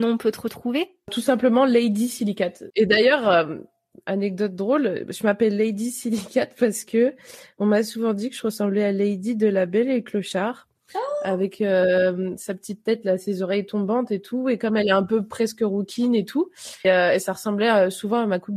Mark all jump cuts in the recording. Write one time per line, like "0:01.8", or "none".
0:02.7
0:16.8